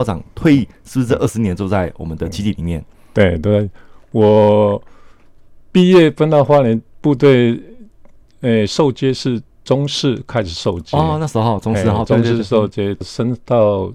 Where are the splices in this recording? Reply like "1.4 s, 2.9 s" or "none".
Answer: 13.0 s